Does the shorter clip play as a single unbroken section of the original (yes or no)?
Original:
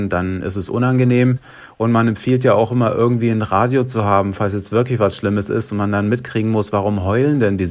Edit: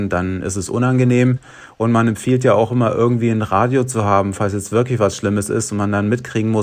yes